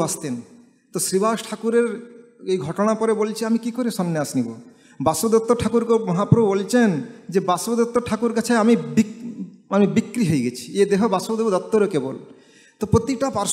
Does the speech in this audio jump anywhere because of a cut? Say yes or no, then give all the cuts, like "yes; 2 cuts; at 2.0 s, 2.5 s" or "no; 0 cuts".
no; 0 cuts